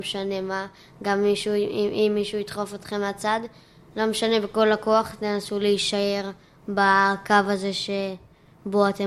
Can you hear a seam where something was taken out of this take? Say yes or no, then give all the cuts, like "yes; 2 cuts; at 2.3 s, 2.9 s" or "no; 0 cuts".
no; 0 cuts